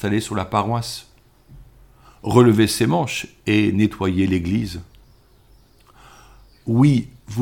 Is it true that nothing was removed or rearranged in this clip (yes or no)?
yes